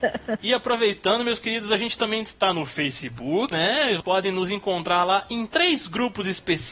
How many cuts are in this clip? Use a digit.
1